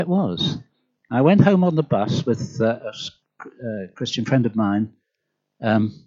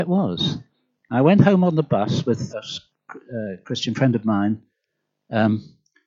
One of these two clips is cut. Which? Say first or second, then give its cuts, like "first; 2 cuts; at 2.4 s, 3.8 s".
second; 1 cut; at 2.5 s